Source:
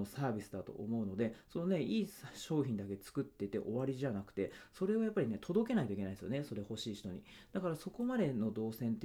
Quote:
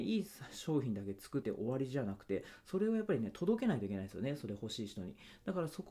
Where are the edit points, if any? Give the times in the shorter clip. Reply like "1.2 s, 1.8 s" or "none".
1.4 s